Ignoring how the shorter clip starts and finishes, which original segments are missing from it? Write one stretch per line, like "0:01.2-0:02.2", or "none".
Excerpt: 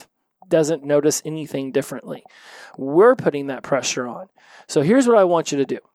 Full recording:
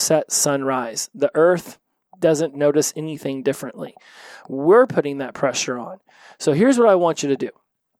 none